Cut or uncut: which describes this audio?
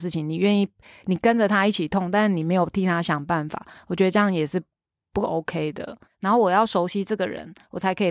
cut